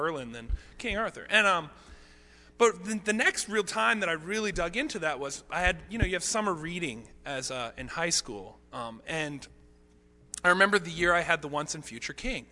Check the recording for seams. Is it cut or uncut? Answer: uncut